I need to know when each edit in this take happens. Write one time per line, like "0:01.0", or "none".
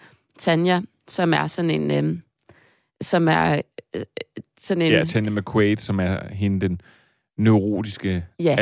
none